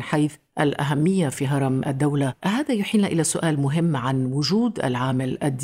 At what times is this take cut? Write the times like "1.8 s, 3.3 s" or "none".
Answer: none

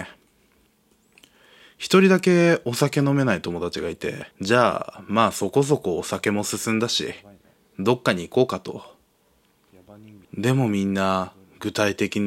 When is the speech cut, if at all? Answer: 4.3 s, 10.2 s

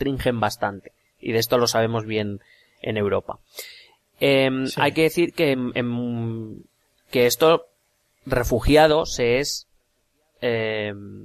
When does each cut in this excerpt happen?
none

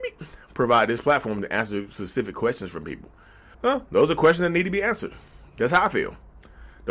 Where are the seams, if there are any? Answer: 3.5 s

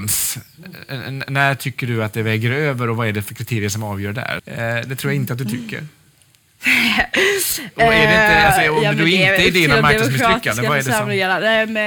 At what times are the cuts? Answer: 4.4 s

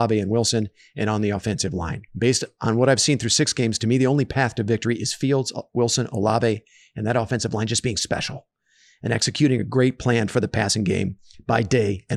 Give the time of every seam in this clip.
2.1 s

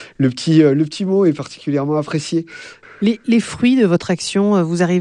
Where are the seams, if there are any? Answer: 2.8 s

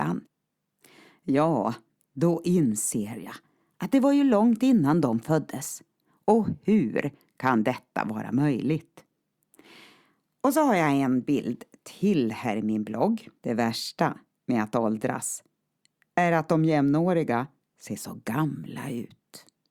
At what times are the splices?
13.4 s

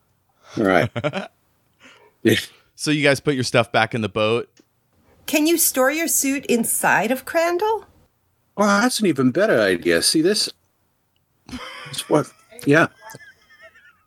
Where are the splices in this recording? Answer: none

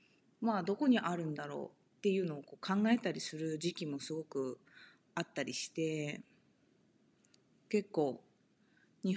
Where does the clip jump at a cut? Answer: none

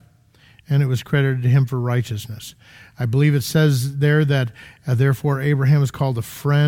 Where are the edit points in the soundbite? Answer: none

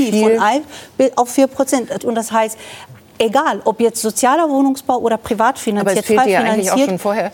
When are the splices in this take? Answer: 2.0 s

